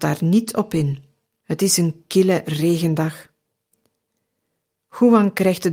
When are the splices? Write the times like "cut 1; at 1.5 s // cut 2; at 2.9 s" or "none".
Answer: cut 1; at 1.4 s